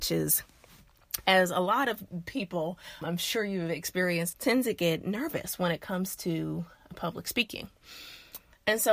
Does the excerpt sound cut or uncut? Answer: cut